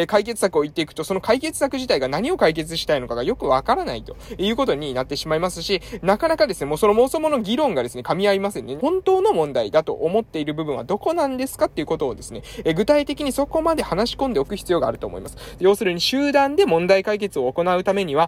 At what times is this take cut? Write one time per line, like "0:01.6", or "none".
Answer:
0:08.8
0:15.6